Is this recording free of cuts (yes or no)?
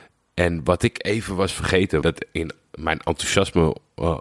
no